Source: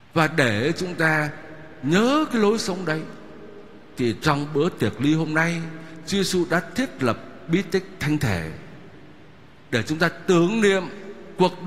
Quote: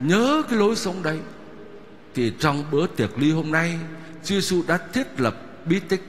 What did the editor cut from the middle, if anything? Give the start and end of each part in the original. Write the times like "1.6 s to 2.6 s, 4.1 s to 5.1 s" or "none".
none

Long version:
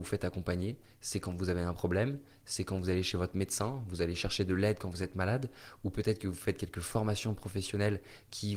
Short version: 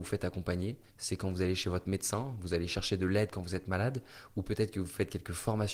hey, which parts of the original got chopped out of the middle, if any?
0.9 s to 2.4 s

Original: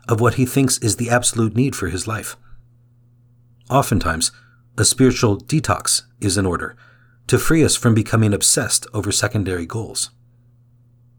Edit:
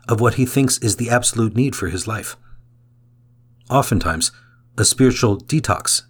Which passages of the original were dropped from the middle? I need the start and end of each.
none

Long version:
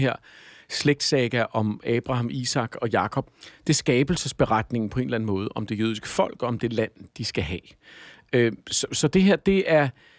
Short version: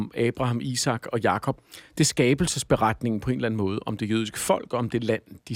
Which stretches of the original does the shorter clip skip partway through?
none

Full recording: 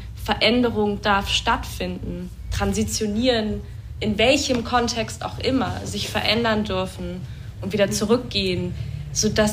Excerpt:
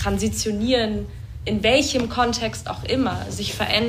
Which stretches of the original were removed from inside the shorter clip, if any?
none

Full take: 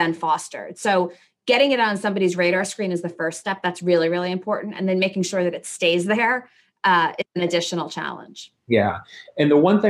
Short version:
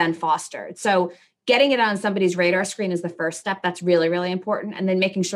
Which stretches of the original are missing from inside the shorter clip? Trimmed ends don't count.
none

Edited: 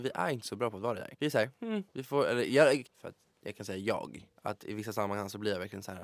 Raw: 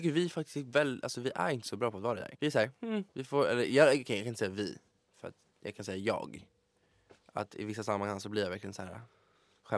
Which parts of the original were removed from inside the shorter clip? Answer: 4.0 s to 5.0 s, 6.6 s to 7.3 s

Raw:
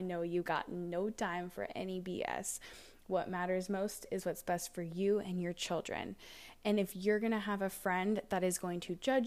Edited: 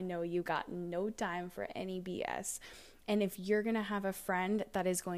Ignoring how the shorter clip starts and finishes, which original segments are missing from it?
3.0 s to 6.6 s

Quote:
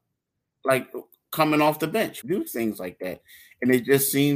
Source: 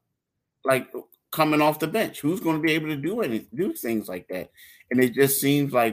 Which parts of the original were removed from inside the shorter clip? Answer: 2.2 s to 3.5 s

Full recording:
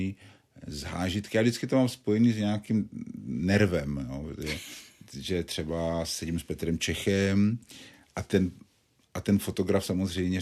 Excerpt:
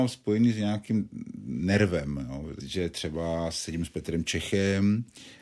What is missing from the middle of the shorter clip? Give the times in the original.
4.4 s to 5.1 s

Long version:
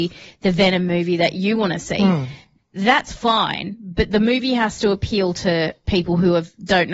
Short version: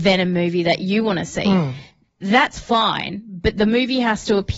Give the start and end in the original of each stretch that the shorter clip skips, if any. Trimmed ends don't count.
none

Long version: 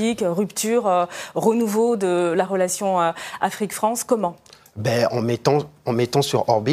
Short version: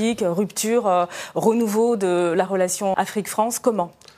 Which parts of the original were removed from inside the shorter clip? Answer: 2.9 s to 3.4 s

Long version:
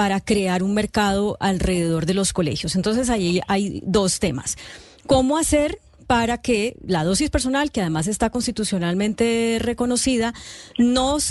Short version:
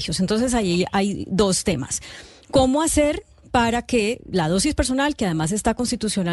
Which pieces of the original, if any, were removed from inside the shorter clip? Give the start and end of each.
none

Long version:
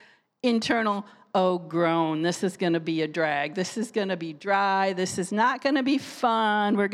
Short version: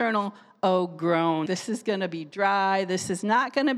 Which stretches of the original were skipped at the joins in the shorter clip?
2.2 s to 3.5 s

